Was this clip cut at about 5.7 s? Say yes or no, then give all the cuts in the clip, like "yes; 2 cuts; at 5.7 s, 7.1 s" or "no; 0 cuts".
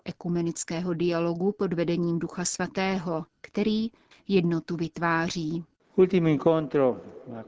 no; 1 cut; at 4.1 s